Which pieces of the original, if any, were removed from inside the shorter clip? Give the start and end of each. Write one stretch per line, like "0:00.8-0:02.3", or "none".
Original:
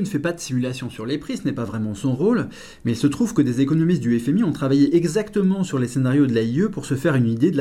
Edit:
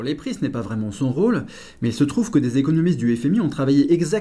none